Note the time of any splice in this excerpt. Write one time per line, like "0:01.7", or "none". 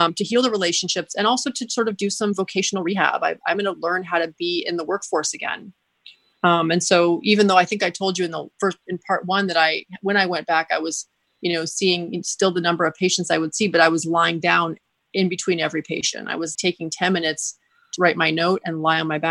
0:16.6
0:18.0